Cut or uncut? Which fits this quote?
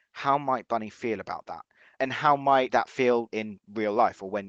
cut